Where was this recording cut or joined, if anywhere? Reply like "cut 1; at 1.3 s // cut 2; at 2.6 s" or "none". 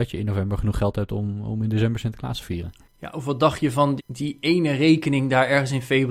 cut 1; at 4.0 s